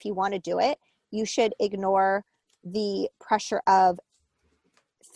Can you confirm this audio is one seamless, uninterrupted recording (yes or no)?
yes